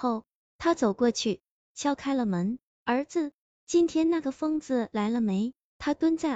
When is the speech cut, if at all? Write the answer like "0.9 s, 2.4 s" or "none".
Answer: none